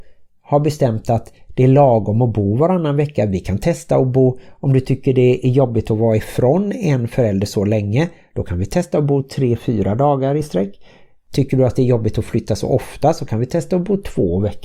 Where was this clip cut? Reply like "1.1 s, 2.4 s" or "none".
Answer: none